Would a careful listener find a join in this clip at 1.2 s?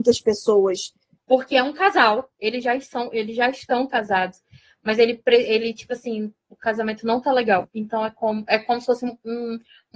yes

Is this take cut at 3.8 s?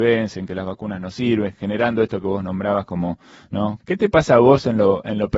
yes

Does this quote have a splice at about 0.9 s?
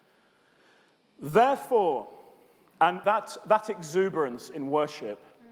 no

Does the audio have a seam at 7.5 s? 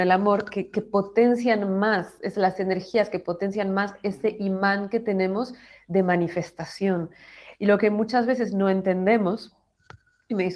yes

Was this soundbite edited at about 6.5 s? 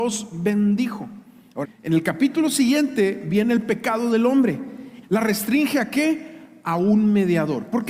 no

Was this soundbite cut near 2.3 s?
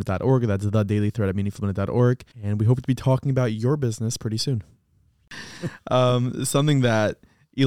yes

